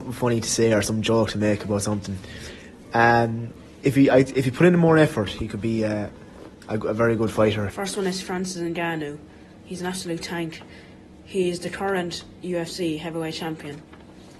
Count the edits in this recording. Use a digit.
1